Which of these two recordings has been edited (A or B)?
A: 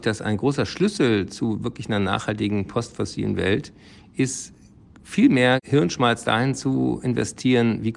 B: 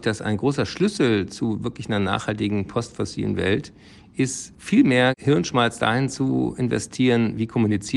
B